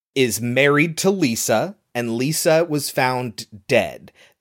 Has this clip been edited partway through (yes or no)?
no